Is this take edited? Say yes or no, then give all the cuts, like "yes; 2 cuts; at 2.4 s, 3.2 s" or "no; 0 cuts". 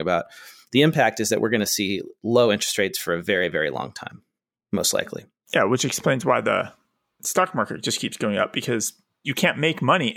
no; 0 cuts